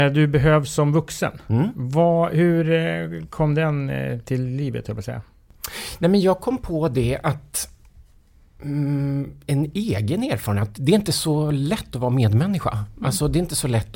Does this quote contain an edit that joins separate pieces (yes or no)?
no